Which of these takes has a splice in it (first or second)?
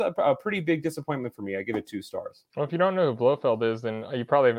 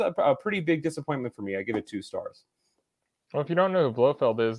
first